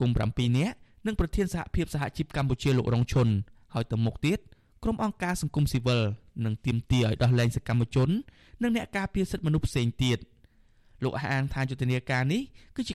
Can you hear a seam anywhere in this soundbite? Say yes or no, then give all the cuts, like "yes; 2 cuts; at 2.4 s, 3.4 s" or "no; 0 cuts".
no; 0 cuts